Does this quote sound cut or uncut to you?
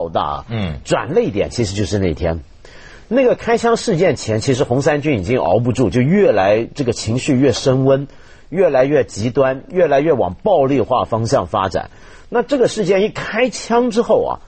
uncut